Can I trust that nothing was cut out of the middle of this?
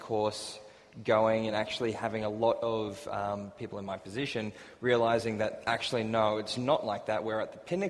yes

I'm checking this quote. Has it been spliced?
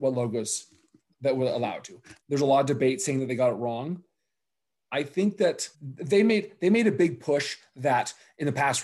yes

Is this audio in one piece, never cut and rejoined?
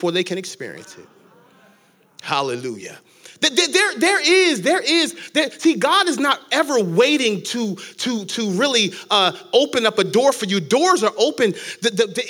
yes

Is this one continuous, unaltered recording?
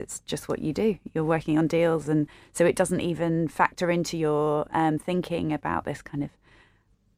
yes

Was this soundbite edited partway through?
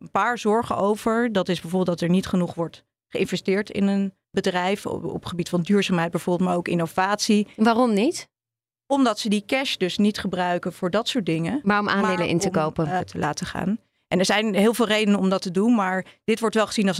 yes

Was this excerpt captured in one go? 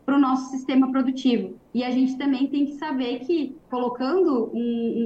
no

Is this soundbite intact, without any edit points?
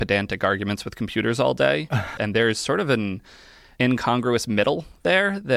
no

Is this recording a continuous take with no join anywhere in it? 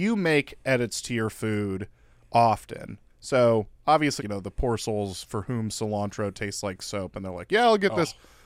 no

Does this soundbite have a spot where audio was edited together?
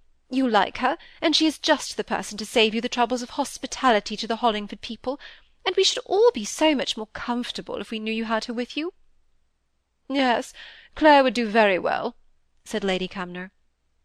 no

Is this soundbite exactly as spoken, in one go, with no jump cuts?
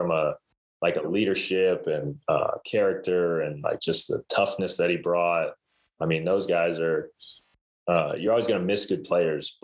yes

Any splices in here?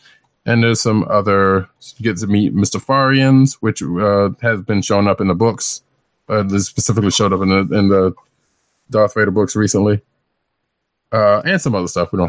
no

